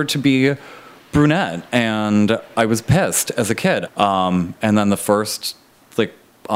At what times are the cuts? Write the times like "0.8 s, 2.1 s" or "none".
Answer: 3.9 s